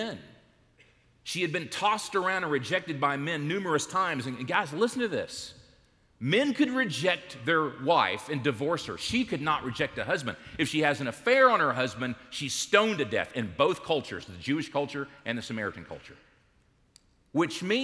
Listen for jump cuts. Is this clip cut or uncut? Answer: uncut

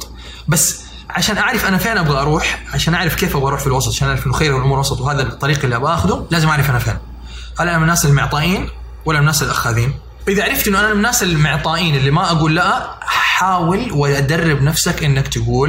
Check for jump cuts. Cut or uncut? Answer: uncut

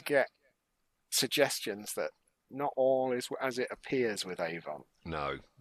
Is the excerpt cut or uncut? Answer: uncut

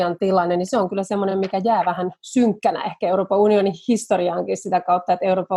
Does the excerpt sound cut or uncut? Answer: uncut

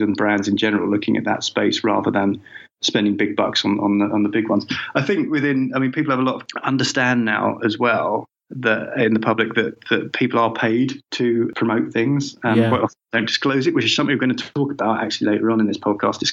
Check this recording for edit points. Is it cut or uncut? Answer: uncut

